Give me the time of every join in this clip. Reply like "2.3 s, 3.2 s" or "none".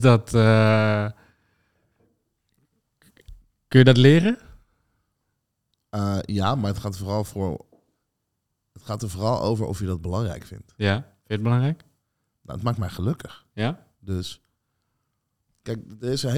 none

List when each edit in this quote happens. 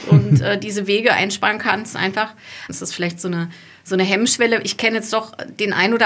2.7 s

